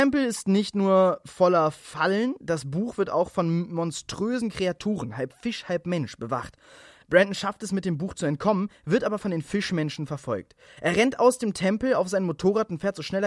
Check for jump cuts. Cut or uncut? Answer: uncut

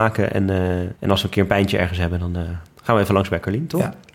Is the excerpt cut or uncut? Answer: cut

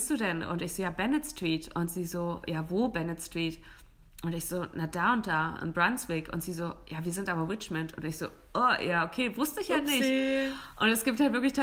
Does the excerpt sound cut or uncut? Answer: uncut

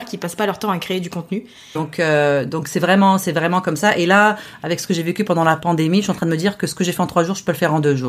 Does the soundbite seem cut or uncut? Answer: cut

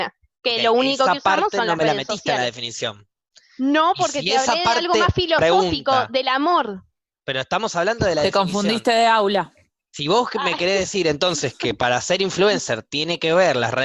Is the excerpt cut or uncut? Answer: uncut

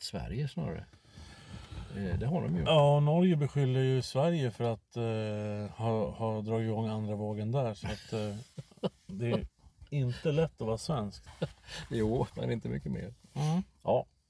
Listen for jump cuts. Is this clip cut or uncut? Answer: cut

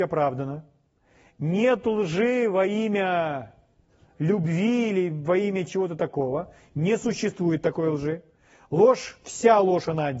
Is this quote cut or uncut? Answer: uncut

